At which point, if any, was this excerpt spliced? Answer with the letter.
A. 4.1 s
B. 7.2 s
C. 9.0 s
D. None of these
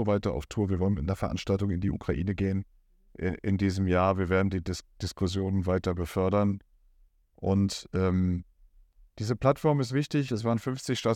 D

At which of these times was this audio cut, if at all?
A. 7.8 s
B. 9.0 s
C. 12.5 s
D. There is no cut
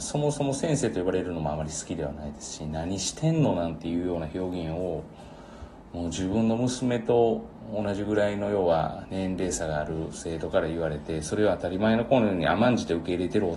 B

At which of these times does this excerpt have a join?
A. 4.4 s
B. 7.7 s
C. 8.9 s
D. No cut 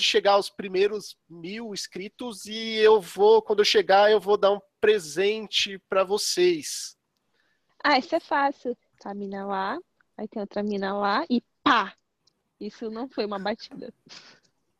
B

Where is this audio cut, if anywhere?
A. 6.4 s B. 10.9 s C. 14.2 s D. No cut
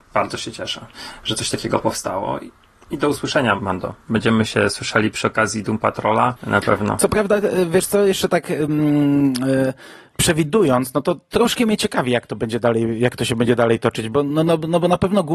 A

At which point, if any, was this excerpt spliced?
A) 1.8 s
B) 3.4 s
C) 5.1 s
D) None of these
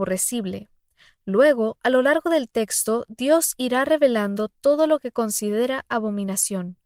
D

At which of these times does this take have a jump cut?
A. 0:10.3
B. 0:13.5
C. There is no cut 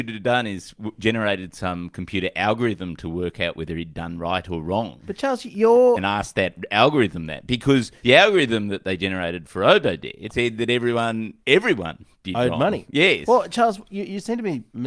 A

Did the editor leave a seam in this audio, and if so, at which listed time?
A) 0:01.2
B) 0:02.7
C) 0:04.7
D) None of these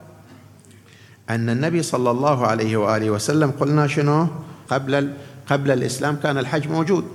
C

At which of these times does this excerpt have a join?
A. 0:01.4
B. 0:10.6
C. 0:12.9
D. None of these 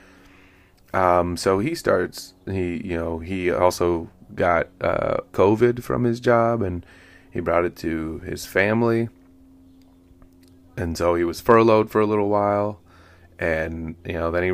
D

